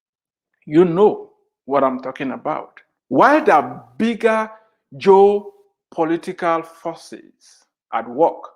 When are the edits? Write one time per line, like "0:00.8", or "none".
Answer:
0:03.0